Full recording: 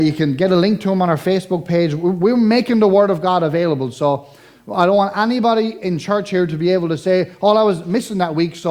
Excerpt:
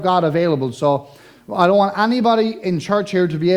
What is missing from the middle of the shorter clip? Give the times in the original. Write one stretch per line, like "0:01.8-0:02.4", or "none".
none